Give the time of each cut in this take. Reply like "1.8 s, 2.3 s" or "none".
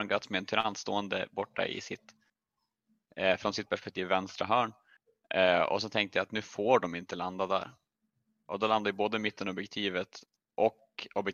none